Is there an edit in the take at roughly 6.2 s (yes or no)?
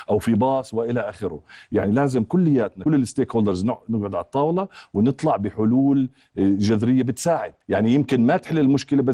no